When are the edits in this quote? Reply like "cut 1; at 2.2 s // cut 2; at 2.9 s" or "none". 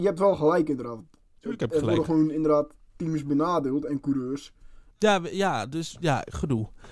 cut 1; at 4.9 s